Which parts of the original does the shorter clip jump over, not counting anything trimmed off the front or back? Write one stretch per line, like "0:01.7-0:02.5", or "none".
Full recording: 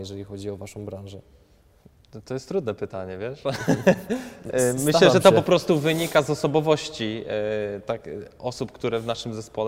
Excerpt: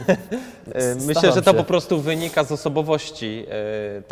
none